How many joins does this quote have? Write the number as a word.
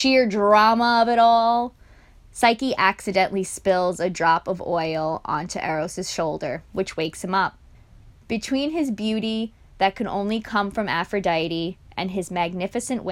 one